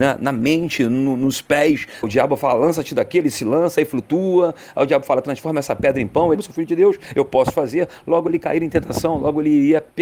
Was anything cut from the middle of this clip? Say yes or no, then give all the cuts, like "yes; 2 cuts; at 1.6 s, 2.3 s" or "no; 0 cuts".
yes; 2 cuts; at 2.0 s, 6.4 s